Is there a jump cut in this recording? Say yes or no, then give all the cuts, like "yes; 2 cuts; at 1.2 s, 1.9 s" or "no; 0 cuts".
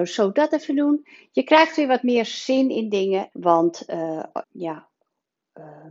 yes; 2 cuts; at 3.3 s, 4.4 s